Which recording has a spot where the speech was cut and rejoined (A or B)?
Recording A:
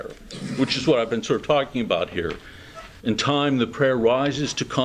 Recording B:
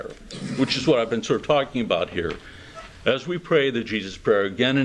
A